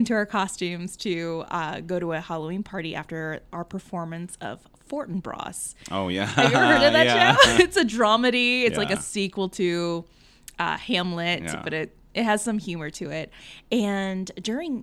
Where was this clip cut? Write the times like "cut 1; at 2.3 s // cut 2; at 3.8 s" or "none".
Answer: none